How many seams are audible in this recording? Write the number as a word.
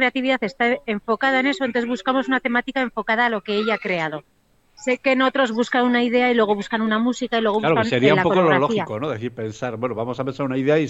one